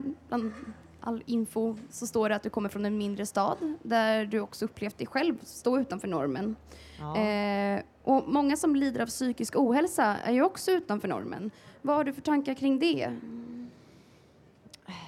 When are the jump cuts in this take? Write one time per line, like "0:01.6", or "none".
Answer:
none